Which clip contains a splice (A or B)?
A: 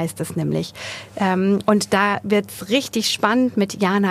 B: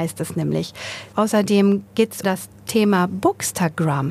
B